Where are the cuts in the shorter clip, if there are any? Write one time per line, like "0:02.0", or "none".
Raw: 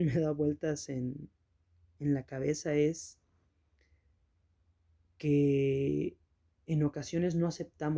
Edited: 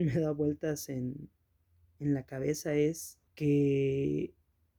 0:03.3